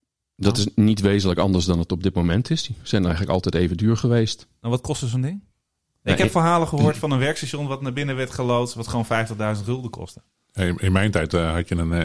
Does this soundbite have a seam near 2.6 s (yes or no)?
no